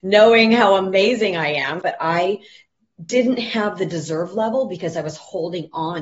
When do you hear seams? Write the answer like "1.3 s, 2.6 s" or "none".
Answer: 1.8 s